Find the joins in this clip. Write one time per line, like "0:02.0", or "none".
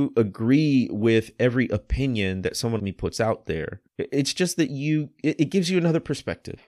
0:02.8
0:03.9